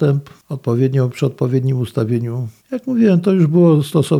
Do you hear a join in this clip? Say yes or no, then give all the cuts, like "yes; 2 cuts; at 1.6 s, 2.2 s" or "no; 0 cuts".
yes; 1 cut; at 2.6 s